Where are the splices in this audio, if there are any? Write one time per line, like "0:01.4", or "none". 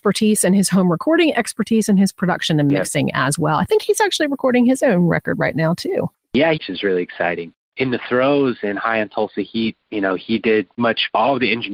0:06.5
0:10.8